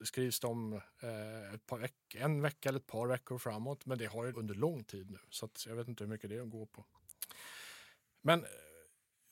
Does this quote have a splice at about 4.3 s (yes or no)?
yes